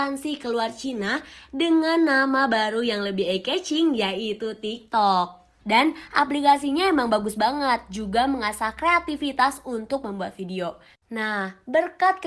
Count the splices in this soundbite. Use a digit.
2